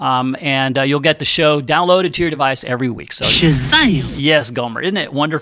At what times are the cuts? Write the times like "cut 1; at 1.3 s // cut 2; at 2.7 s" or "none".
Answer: none